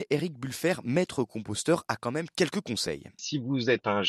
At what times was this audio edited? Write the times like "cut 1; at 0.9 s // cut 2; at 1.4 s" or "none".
none